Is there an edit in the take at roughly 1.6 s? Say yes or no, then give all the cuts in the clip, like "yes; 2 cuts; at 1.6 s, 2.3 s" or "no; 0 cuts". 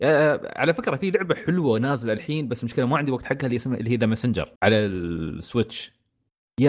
no; 1 cut; at 4.6 s